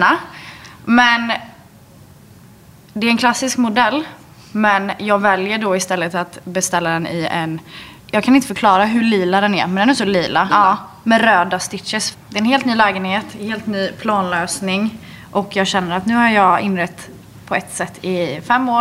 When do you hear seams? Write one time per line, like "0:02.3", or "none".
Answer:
0:08.0
0:10.5
0:12.1